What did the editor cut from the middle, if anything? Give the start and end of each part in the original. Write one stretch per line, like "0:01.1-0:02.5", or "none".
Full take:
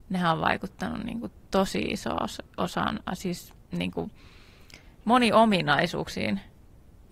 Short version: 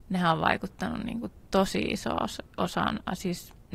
none